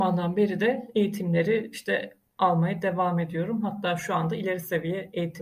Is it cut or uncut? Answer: uncut